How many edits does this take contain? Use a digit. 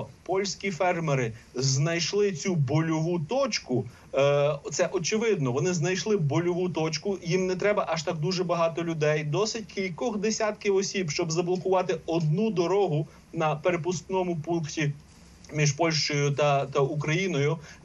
0